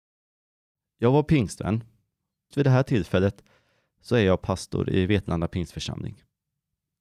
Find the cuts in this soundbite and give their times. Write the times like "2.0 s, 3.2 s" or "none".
2.5 s